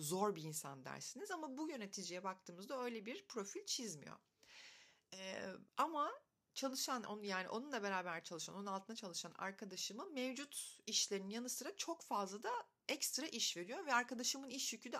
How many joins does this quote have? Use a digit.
1